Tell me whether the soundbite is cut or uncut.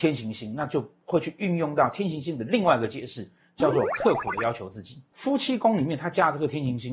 uncut